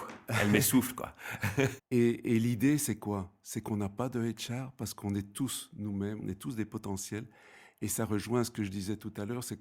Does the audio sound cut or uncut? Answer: cut